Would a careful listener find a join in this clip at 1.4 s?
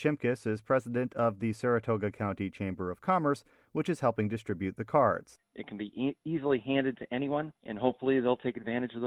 no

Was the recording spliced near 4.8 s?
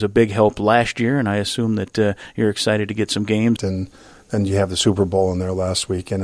no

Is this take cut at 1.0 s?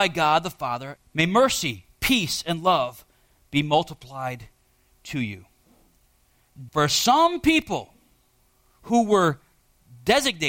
yes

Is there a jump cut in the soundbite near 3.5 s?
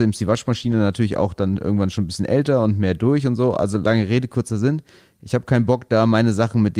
no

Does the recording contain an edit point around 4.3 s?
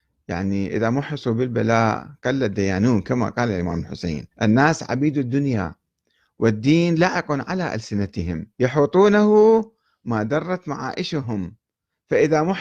yes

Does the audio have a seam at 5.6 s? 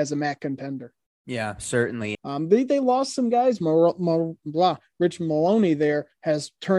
no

